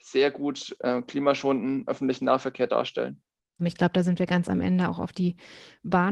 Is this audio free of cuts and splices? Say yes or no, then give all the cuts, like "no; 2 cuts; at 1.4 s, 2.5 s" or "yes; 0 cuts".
no; 1 cut; at 3.6 s